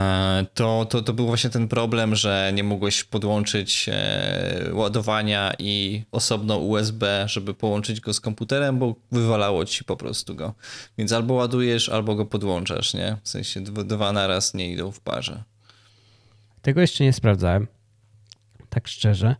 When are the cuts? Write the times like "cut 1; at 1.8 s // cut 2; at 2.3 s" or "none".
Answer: cut 1; at 6.1 s